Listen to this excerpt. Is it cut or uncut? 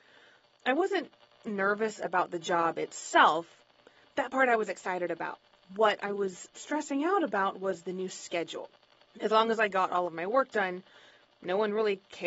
cut